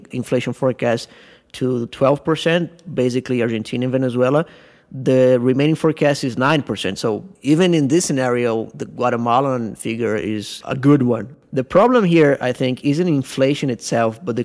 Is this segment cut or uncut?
uncut